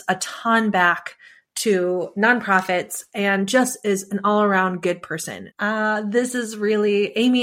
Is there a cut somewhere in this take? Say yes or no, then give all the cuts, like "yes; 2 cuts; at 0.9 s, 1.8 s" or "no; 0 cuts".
yes; 1 cut; at 5.5 s